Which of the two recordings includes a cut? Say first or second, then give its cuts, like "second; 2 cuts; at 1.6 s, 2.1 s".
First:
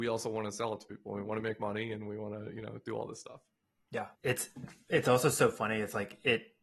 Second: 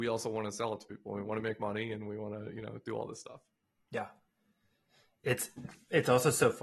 first; 1 cut; at 4.1 s